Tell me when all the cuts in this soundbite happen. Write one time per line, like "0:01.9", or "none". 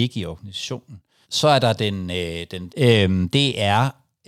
0:01.2
0:02.7